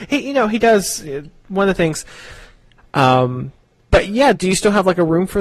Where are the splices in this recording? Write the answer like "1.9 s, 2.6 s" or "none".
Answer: 2.8 s, 4.3 s